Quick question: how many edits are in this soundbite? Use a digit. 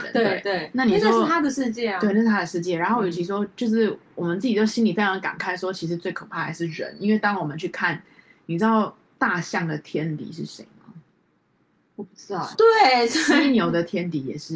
1